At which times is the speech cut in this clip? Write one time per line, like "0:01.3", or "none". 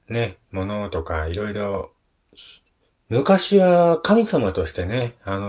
0:02.9